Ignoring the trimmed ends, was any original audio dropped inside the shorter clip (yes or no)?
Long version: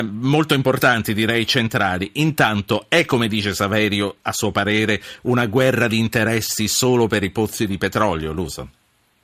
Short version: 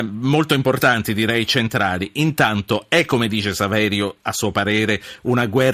no